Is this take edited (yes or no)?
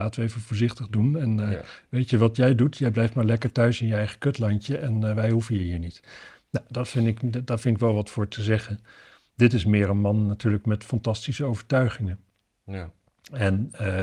yes